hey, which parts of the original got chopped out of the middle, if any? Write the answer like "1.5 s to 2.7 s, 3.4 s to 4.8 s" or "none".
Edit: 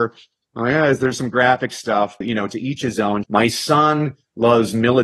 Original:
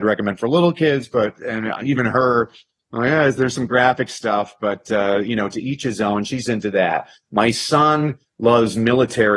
4.6 s to 5.2 s, 6.2 s to 7.3 s